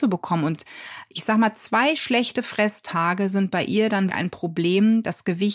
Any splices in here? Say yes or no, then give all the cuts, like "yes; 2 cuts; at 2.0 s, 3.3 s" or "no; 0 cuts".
yes; 1 cut; at 4.1 s